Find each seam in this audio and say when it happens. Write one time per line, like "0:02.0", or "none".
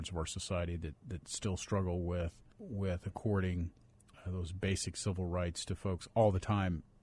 0:02.5